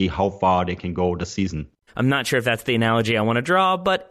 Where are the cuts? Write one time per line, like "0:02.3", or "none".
0:01.9

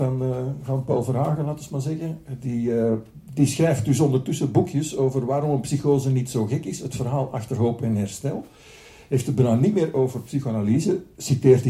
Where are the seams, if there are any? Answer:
none

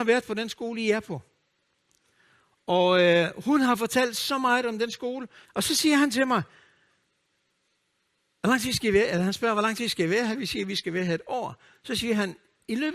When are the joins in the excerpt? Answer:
0:05.4

